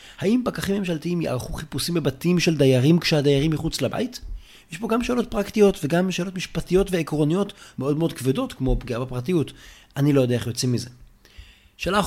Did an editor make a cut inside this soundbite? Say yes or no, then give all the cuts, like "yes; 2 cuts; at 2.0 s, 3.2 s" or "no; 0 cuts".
no; 0 cuts